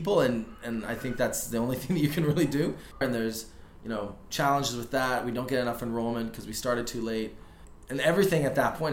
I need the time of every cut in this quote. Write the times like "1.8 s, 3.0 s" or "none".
3.0 s